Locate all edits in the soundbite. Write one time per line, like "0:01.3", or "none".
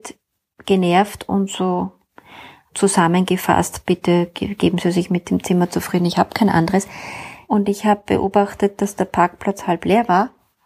0:02.7
0:07.5